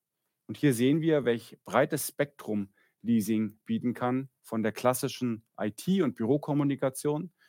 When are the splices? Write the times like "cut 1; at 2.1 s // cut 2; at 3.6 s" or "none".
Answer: none